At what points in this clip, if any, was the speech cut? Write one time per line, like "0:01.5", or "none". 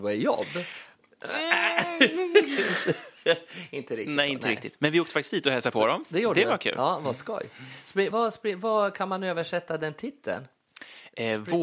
0:08.1